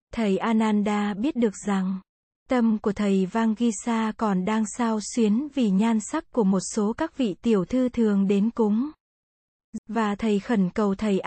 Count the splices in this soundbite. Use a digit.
1